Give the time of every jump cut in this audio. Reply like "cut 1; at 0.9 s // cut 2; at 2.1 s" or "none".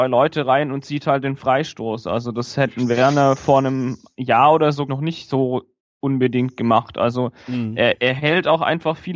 cut 1; at 4.9 s